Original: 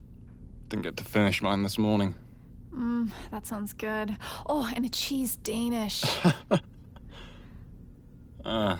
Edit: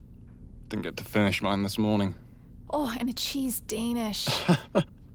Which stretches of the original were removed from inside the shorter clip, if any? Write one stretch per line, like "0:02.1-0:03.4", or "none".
0:02.7-0:04.4